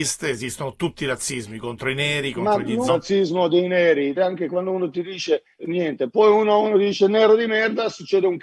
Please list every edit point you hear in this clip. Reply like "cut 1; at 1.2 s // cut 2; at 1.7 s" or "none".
cut 1; at 2.9 s // cut 2; at 4.2 s // cut 3; at 5.6 s